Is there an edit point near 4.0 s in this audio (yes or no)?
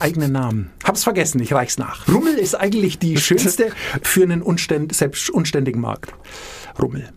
yes